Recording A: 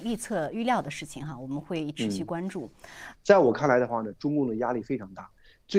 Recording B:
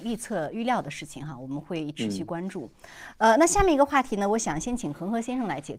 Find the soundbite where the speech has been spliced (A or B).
A